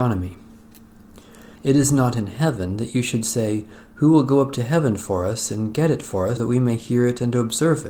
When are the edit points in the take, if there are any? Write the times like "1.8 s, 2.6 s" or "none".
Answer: 1.6 s, 6.4 s